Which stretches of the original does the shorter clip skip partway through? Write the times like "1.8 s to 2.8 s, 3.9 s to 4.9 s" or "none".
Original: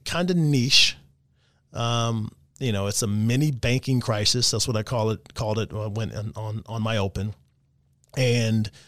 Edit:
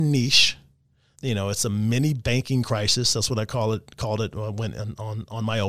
1.5 s to 2.5 s